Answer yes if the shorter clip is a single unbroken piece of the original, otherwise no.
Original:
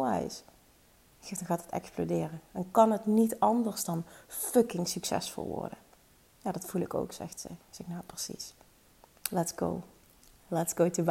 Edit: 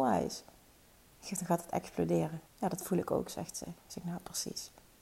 no